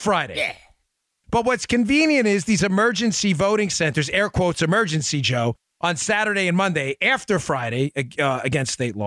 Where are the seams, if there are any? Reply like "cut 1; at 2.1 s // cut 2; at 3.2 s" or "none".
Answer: cut 1; at 1.2 s